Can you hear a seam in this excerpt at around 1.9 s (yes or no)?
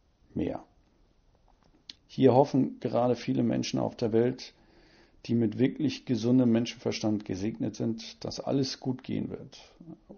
yes